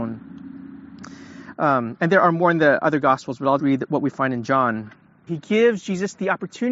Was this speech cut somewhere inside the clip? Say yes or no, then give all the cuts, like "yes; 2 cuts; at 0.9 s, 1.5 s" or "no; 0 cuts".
yes; 3 cuts; at 1.5 s, 3.6 s, 5.3 s